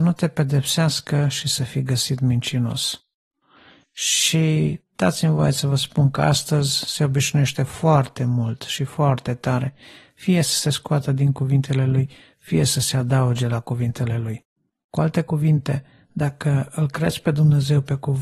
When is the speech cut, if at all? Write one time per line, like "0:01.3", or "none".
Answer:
0:14.9